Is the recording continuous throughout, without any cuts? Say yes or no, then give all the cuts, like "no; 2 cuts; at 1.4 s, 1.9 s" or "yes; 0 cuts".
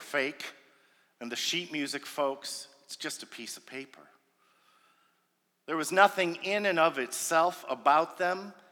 yes; 0 cuts